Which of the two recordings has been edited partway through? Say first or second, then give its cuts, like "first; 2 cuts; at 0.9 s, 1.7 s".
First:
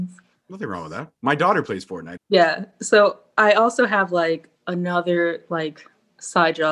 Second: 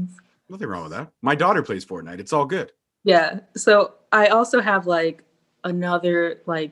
first; 2 cuts; at 2.2 s, 4.6 s